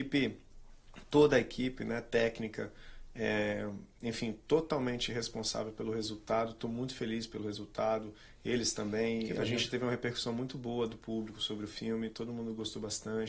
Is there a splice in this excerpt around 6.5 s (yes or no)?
no